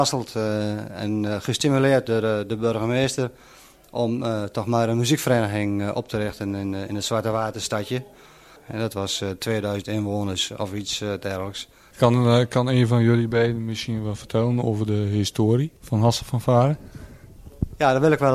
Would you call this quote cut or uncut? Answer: cut